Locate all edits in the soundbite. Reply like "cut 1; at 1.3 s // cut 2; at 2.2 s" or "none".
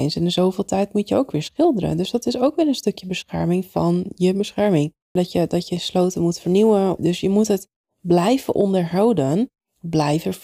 cut 1; at 5.2 s // cut 2; at 7.0 s